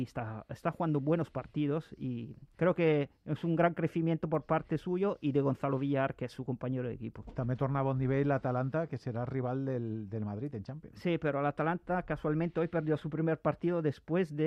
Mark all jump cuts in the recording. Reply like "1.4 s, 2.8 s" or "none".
none